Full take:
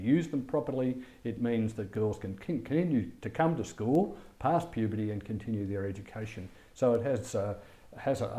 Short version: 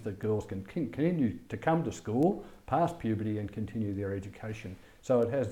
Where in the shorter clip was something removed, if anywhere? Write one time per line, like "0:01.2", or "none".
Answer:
none